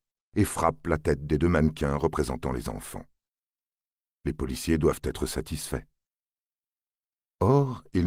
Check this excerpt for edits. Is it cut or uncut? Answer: uncut